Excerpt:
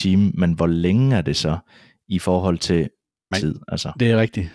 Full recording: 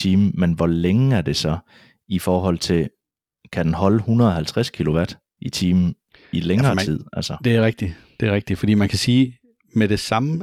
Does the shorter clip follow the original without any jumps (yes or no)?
no